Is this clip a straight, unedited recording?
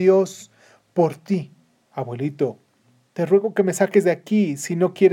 no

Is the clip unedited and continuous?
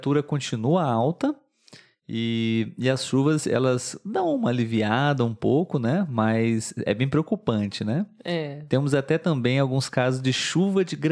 yes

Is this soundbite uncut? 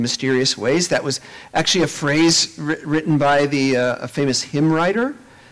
yes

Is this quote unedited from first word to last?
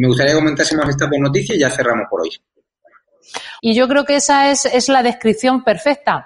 no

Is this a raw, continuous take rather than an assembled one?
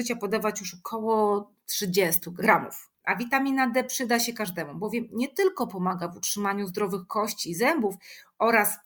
no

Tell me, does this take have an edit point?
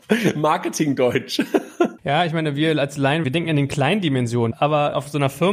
yes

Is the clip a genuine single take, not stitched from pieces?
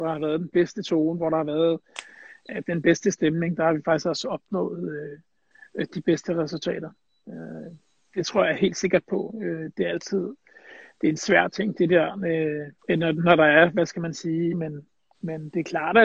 no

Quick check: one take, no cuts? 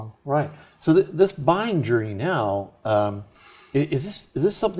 yes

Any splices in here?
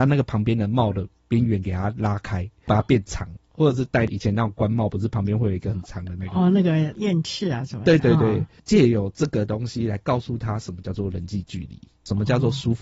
yes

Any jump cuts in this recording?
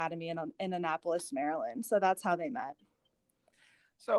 no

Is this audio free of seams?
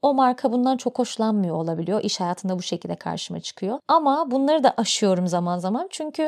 yes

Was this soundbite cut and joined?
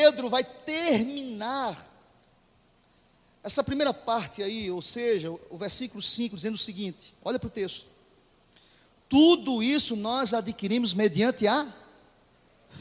no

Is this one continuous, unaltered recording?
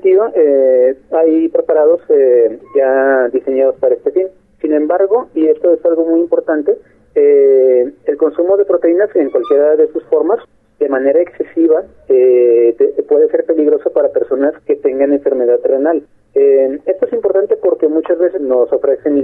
no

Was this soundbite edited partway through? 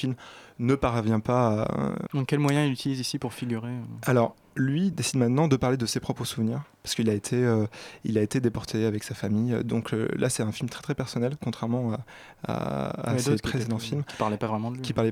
yes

